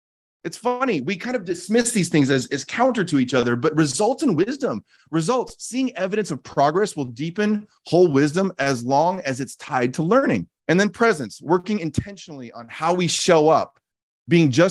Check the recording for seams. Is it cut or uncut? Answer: cut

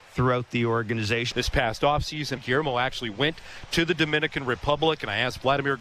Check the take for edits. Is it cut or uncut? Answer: cut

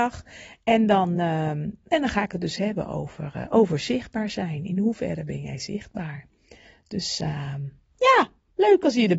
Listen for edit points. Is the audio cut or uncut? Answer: uncut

